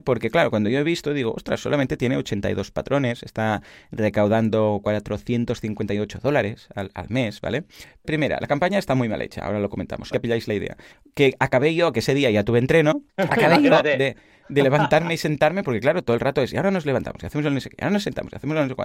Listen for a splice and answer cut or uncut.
cut